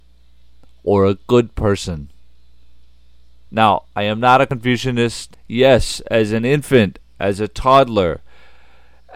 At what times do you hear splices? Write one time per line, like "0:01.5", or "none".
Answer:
0:05.3